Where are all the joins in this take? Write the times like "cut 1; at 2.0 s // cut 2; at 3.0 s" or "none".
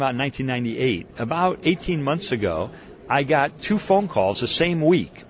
none